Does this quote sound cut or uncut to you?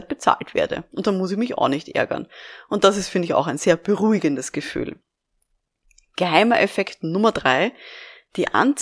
uncut